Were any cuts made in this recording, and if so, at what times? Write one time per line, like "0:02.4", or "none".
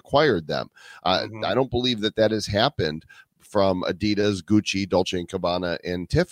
none